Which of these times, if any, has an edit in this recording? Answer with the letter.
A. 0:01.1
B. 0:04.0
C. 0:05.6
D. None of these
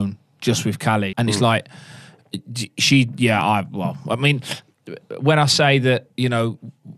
A